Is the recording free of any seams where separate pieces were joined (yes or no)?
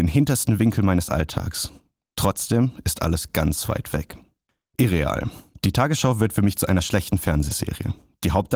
yes